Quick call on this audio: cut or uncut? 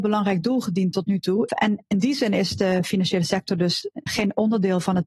cut